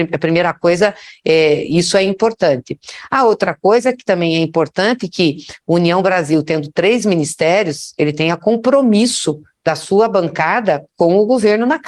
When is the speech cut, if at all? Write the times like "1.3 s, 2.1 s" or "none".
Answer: none